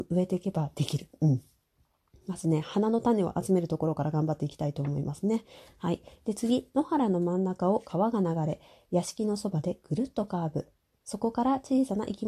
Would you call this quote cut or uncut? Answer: uncut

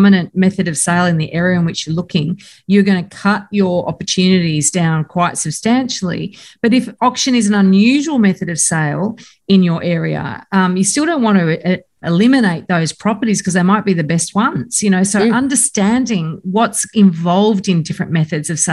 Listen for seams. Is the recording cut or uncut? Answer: cut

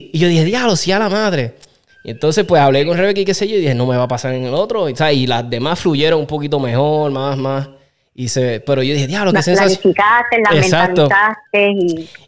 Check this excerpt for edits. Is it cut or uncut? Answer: uncut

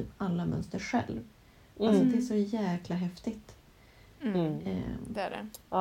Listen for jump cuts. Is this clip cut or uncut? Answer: uncut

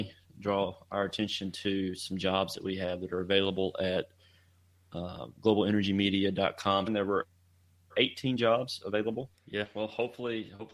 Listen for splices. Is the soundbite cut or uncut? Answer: cut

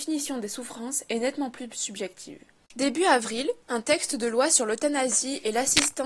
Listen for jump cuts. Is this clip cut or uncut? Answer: cut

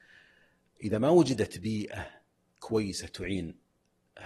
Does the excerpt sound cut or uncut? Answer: uncut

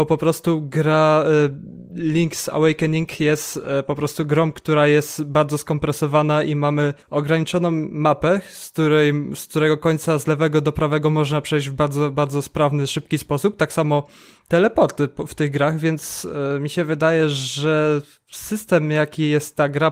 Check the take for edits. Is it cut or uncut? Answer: cut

